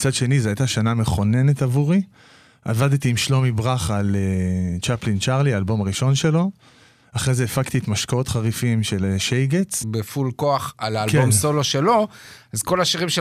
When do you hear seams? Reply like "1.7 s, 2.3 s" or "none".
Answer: 9.8 s